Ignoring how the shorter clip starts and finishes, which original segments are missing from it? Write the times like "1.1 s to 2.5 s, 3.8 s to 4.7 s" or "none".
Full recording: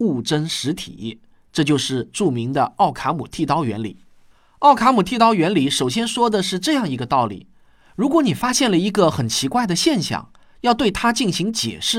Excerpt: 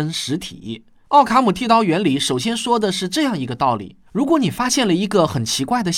1.4 s to 4.5 s, 7.6 s to 7.9 s